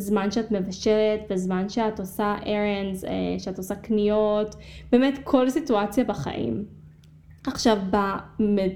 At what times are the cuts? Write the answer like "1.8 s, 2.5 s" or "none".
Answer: none